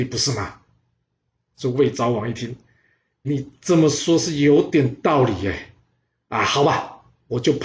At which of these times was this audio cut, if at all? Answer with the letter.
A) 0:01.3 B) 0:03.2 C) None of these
B